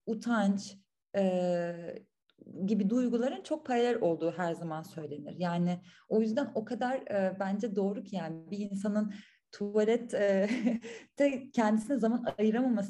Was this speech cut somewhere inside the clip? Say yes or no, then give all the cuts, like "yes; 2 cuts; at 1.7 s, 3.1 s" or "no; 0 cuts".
no; 0 cuts